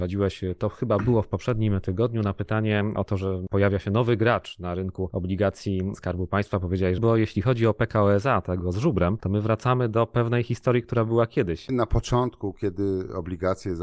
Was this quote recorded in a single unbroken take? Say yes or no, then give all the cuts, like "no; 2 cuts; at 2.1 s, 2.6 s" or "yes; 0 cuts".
no; 2 cuts; at 7.0 s, 11.7 s